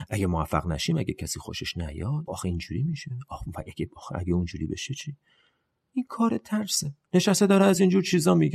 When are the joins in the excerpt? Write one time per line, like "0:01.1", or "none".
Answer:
0:02.3